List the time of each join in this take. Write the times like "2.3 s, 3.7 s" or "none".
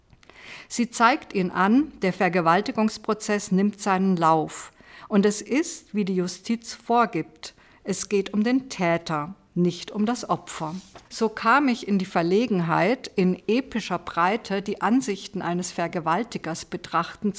11.1 s